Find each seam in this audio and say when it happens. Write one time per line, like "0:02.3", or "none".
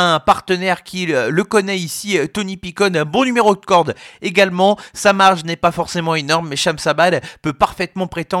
none

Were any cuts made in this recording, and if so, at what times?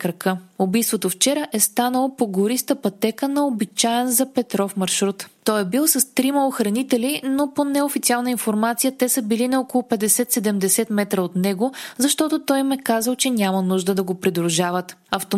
none

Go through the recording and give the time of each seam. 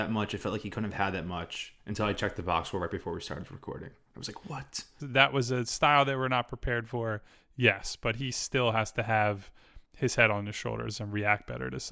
0:05.0

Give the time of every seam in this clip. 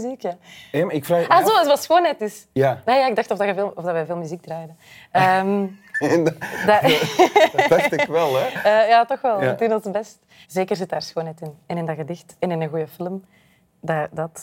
0:10.4

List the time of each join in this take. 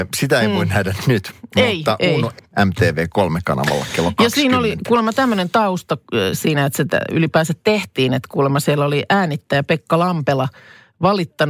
0:02.4

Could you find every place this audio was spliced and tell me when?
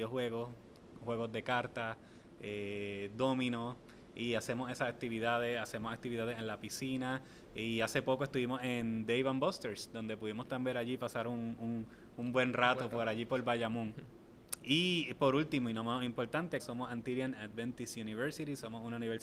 0:14.6
0:16.6

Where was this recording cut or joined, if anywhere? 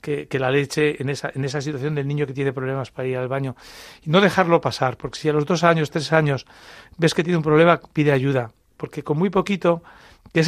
none

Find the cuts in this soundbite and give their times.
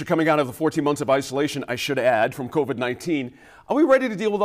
none

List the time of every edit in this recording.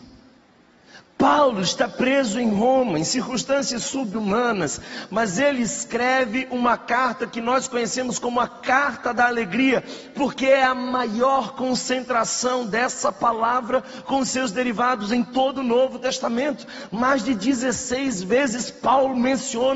none

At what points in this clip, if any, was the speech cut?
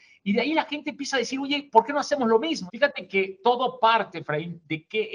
0:02.7

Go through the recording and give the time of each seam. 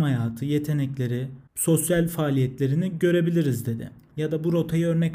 0:04.1

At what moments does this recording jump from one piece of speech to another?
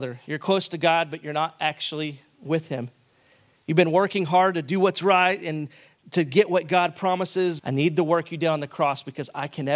0:07.6

